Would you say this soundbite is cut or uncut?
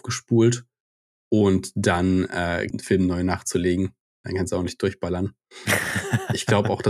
cut